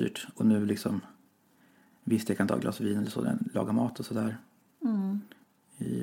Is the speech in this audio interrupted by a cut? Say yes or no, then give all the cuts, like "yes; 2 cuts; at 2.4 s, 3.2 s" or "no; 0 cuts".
no; 0 cuts